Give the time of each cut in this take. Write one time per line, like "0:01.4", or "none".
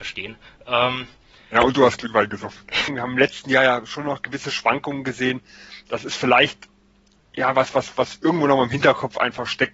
0:02.9